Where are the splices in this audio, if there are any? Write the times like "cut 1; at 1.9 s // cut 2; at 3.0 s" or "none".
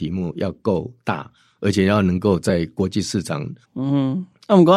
cut 1; at 3.6 s